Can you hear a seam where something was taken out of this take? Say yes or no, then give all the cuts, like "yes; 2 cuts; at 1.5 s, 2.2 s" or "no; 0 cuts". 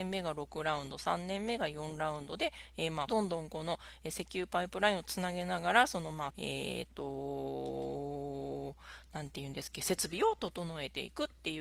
yes; 2 cuts; at 3.1 s, 6.3 s